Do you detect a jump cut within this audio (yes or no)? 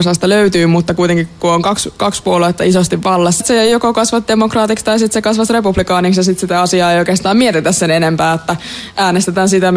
yes